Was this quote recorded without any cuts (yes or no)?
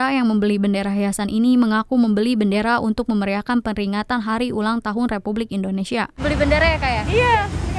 yes